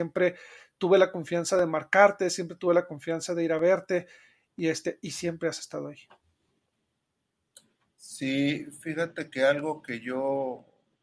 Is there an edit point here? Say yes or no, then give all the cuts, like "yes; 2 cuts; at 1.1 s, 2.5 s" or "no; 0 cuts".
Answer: no; 0 cuts